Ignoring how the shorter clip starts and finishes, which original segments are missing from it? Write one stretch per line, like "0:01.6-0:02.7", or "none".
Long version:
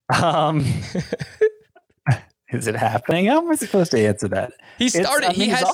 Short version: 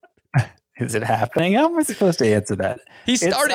none